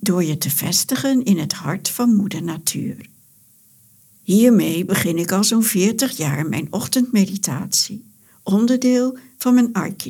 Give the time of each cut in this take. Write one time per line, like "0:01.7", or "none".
none